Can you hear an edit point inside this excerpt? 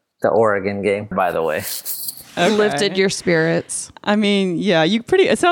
yes; 1 cut; at 1.1 s

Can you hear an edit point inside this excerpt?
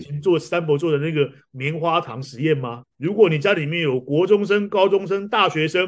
yes; 1 cut; at 2.8 s

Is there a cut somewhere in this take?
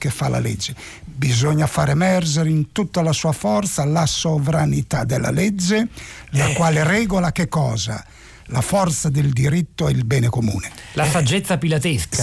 no; 0 cuts

